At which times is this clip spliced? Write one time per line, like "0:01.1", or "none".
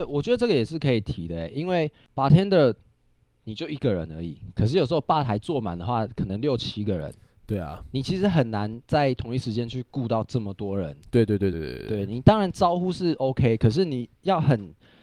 0:11.5